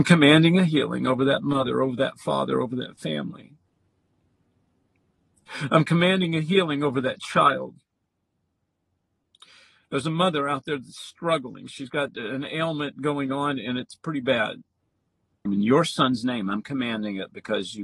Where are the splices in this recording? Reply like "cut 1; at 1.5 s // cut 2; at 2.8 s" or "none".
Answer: cut 1; at 15.5 s